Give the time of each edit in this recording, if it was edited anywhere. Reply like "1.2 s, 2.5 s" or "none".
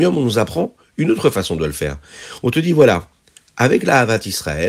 none